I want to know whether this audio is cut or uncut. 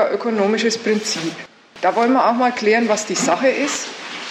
uncut